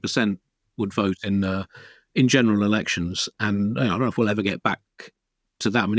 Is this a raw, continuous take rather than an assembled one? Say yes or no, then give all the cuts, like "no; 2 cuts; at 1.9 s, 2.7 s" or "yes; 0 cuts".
yes; 0 cuts